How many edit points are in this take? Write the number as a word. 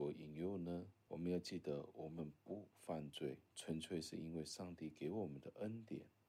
two